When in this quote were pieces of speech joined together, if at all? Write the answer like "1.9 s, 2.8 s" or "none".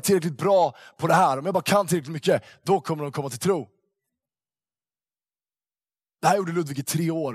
none